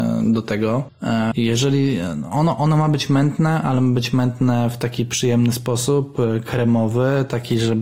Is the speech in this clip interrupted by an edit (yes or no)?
yes